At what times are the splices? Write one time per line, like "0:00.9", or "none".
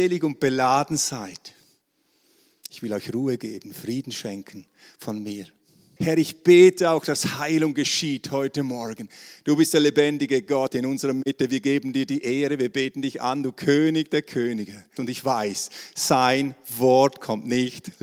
0:06.0
0:15.0

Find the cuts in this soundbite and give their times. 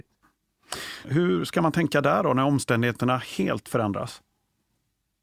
0:01.0

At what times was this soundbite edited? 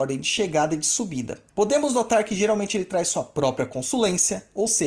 0:01.5

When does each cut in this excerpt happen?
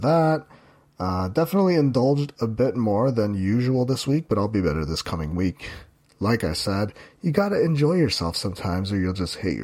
none

